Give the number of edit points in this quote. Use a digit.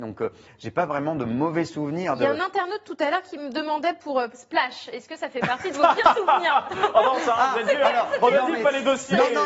0